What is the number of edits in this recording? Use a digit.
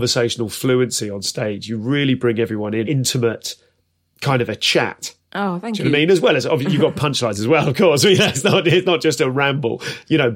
1